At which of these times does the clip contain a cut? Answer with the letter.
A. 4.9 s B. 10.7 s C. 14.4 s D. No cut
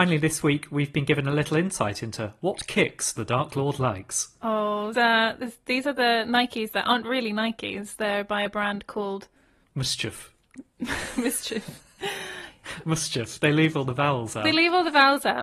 A